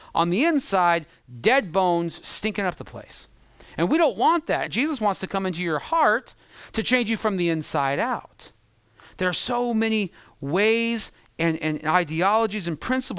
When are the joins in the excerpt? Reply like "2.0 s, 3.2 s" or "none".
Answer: 4.7 s